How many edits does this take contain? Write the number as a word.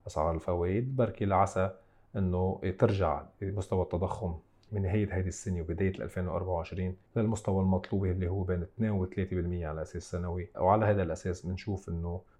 one